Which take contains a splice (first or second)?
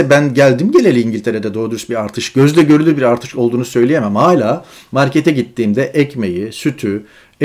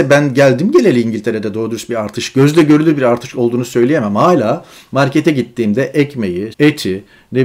second